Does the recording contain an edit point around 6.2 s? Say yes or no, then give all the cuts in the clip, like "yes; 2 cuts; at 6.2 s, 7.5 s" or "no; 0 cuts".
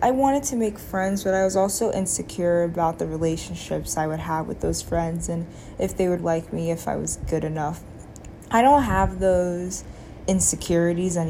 yes; 1 cut; at 6.2 s